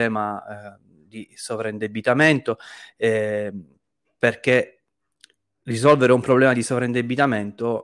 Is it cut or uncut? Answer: uncut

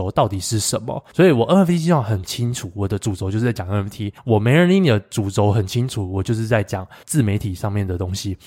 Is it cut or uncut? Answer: uncut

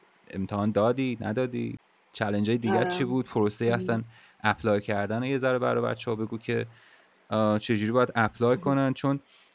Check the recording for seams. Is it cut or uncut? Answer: cut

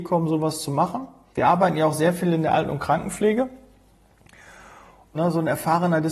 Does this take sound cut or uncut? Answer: cut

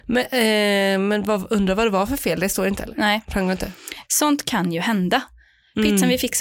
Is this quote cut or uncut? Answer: cut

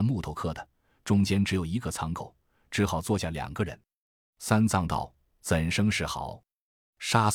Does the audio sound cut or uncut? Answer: uncut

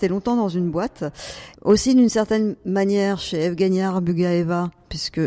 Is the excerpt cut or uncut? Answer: cut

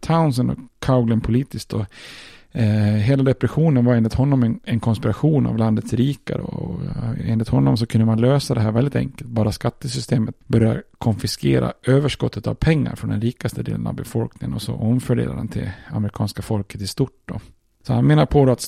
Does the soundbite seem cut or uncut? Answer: uncut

